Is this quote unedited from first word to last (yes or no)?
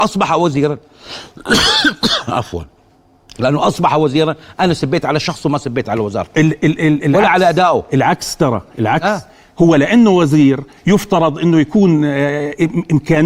yes